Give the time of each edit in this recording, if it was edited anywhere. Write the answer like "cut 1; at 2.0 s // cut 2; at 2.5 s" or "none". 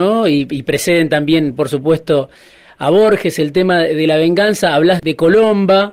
cut 1; at 5.0 s

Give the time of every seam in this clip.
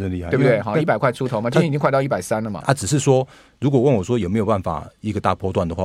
cut 1; at 2.6 s

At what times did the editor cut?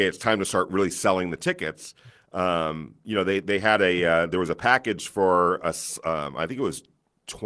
none

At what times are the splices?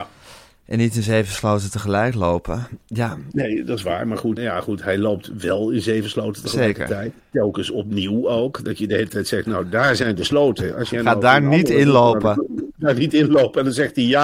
cut 1; at 2.8 s // cut 2; at 4.4 s

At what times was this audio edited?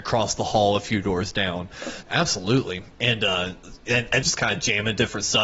cut 1; at 2.0 s // cut 2; at 4.2 s

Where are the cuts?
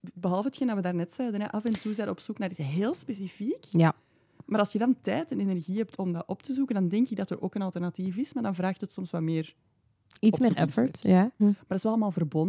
cut 1; at 11.4 s

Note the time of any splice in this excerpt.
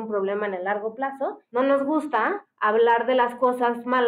cut 1; at 1.5 s

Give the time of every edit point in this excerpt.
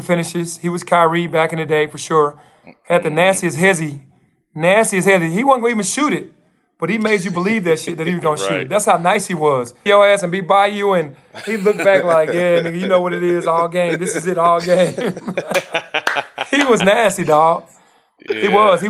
cut 1; at 9.9 s

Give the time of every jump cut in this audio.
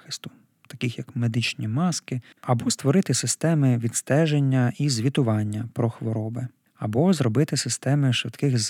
cut 1; at 2.3 s

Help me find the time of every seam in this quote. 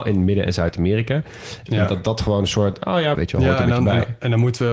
cut 1; at 1.7 s // cut 2; at 3.1 s

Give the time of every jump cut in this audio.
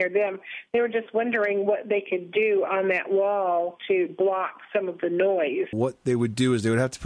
cut 1; at 5.7 s

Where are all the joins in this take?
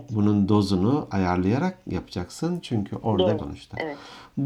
cut 1; at 3.4 s

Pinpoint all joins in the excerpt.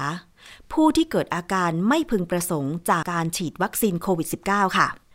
cut 1; at 3.0 s

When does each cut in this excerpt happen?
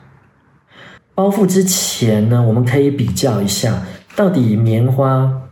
cut 1; at 1.0 s

